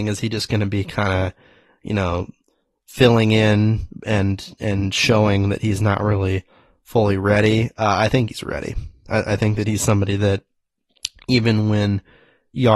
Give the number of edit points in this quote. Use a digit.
0